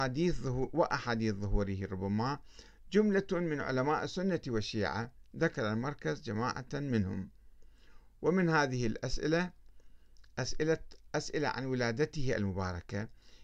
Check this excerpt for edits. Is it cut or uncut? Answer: uncut